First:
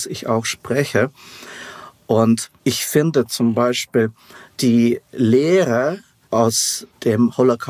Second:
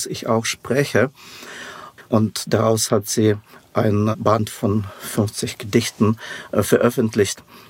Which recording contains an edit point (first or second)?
second